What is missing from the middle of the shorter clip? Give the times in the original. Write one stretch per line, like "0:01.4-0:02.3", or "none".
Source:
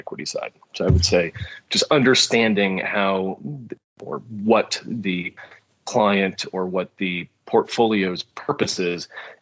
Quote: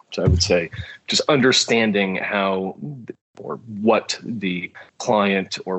0:05.5-0:05.8